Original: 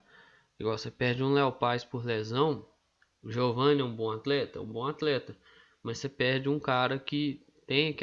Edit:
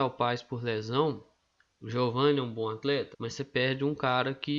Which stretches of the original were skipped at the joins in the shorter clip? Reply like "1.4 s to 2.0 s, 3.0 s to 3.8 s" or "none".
4.5 s to 5.8 s